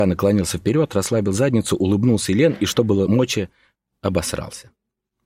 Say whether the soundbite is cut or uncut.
uncut